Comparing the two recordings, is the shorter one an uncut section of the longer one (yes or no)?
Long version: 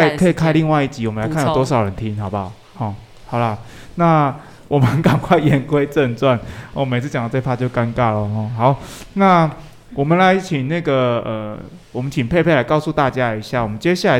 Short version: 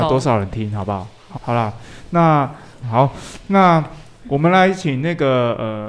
no